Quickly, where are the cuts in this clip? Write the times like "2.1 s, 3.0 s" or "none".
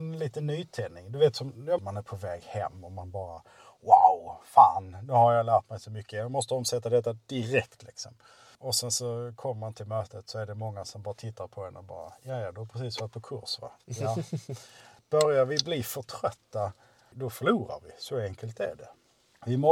1.8 s